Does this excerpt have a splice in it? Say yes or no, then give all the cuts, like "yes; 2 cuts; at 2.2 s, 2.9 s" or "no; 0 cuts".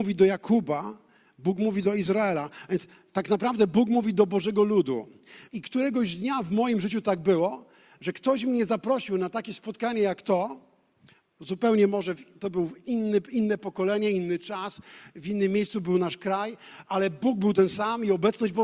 yes; 1 cut; at 5.5 s